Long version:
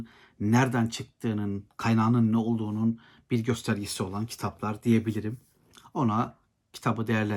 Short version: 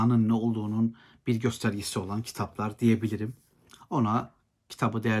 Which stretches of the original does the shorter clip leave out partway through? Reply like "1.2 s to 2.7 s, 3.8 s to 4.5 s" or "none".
none